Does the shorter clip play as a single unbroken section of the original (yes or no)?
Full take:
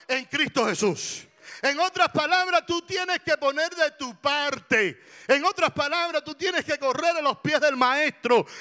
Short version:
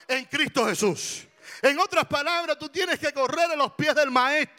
no